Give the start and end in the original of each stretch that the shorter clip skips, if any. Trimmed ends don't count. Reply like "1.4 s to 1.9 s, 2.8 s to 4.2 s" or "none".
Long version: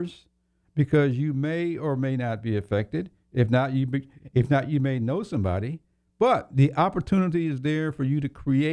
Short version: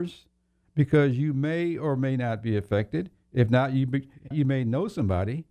4.3 s to 4.7 s